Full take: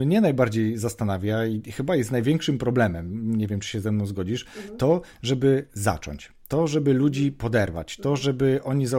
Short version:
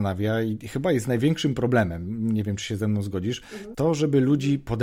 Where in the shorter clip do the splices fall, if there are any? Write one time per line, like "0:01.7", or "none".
0:03.7